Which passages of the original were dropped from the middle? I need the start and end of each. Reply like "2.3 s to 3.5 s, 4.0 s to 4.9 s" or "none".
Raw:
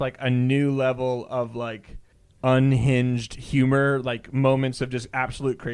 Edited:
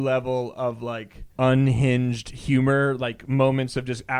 2.0 s to 2.4 s